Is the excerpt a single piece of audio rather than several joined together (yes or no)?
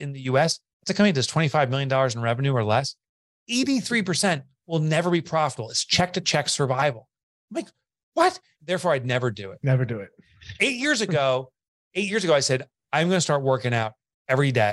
no